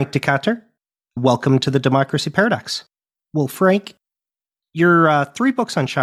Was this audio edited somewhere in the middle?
yes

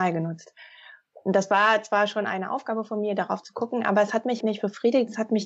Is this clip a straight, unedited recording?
no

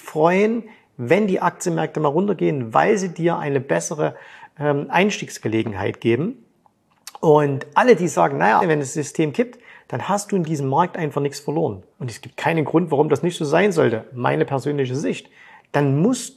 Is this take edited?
yes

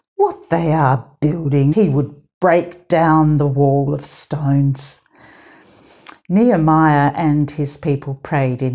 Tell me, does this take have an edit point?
yes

